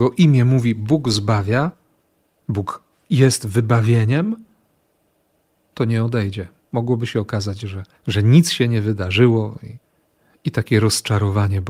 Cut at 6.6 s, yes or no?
yes